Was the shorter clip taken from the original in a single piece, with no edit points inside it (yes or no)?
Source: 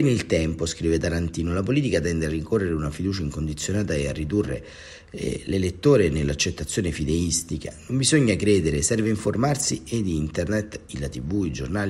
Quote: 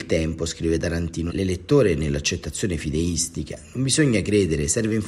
no